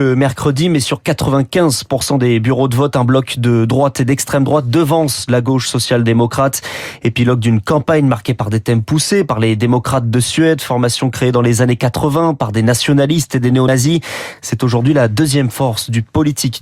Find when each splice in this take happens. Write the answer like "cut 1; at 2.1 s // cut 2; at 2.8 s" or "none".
none